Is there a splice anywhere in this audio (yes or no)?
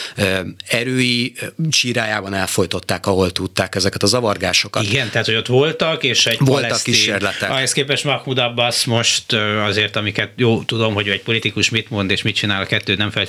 no